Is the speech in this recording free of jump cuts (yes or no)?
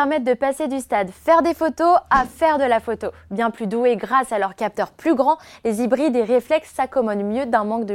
no